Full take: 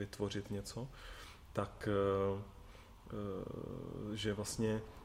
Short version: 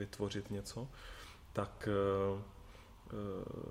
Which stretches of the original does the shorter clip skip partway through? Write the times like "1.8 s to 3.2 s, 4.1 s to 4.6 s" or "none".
none